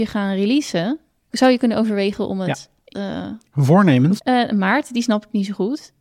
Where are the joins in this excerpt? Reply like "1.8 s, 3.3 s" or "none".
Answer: 2.9 s, 4.2 s